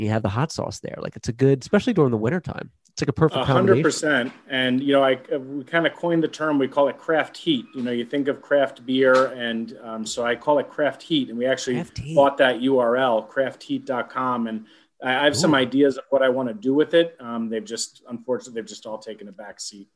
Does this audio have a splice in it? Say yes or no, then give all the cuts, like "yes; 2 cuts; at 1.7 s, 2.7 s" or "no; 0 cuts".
no; 0 cuts